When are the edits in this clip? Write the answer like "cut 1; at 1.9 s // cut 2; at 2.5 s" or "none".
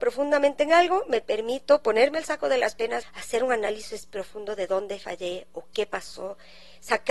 cut 1; at 3.0 s